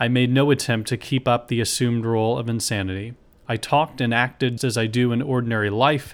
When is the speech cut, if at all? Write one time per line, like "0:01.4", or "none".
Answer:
0:04.6